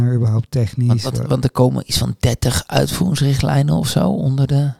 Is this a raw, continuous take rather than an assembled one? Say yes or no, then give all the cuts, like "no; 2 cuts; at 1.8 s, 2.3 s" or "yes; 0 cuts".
yes; 0 cuts